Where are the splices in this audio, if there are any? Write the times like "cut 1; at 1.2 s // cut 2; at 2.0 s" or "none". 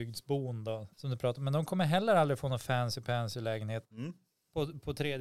cut 1; at 0.9 s // cut 2; at 3.8 s